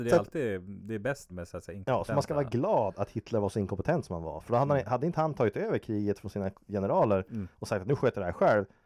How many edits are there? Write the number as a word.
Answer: one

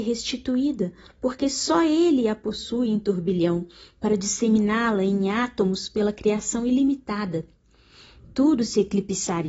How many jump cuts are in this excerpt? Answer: zero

